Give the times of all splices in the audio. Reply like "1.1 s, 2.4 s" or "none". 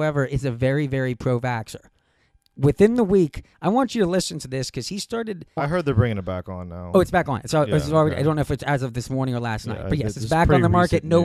5.6 s